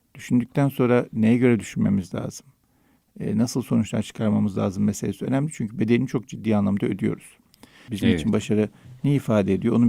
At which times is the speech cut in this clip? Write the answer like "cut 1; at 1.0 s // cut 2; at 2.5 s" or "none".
cut 1; at 7.9 s